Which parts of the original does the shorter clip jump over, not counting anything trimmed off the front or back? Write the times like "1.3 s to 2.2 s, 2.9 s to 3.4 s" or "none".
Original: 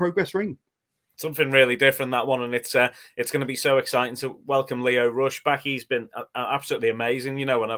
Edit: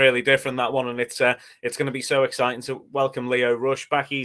none